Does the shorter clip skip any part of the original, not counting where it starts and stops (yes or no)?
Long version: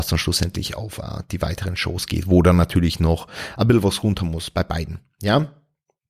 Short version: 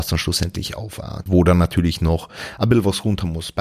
yes